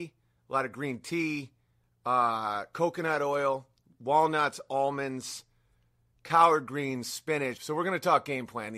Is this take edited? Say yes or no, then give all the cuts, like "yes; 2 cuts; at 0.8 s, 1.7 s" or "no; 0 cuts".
yes; 1 cut; at 7.6 s